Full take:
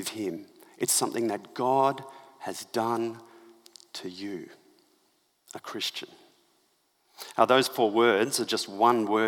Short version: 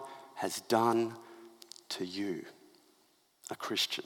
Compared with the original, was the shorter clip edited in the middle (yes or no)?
no